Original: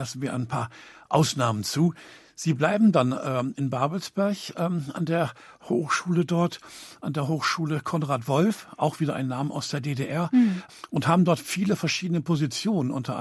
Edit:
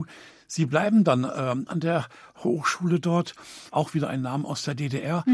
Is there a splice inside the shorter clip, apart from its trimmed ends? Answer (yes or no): yes